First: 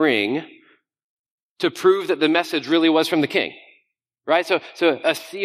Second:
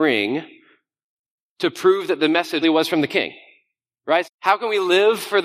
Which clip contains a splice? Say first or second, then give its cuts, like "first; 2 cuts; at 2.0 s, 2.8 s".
second; 2 cuts; at 2.6 s, 4.2 s